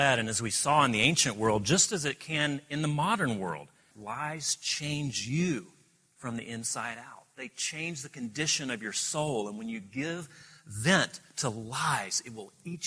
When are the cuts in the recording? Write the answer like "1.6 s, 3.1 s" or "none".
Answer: 3.9 s